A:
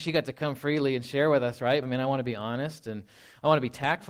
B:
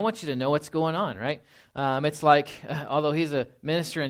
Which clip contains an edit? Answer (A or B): A